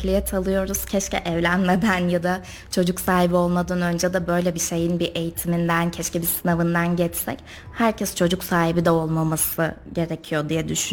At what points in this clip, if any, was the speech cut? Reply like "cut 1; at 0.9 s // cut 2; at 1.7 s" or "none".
none